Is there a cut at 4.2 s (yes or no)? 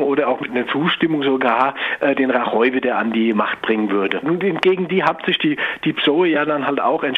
yes